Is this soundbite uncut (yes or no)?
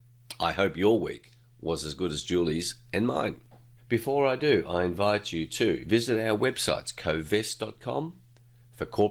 no